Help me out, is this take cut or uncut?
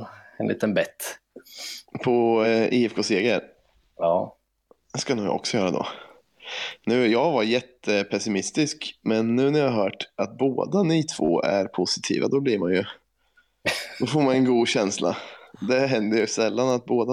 uncut